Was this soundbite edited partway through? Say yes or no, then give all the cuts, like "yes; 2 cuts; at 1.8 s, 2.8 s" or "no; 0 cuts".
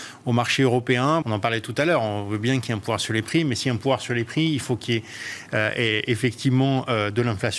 yes; 1 cut; at 1.2 s